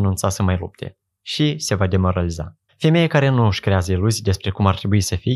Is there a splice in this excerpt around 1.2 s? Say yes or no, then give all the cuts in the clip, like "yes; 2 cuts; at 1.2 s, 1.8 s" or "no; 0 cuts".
no; 1 cut; at 2.7 s